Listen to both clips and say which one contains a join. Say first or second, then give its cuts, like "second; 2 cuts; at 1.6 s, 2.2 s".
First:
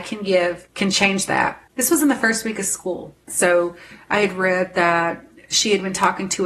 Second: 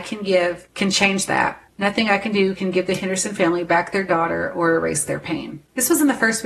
first; 2 cuts; at 1.7 s, 3.3 s